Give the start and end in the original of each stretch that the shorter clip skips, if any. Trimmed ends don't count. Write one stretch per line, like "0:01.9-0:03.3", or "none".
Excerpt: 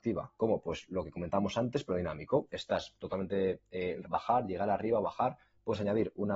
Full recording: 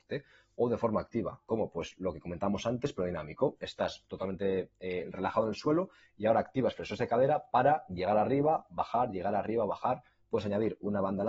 0:05.1-0:08.7